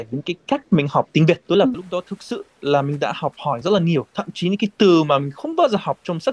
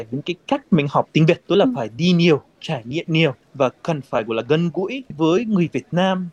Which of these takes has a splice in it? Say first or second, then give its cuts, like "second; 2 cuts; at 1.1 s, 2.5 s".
first; 1 cut; at 1.7 s